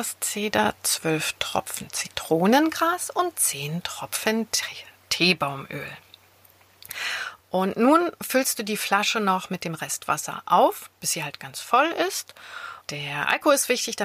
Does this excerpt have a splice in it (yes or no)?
yes